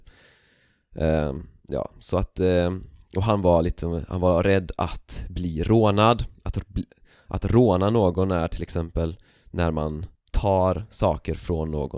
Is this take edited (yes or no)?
yes